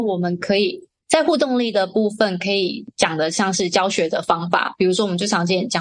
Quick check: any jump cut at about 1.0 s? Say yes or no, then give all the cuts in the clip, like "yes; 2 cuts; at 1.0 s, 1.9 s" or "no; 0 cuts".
yes; 1 cut; at 1.0 s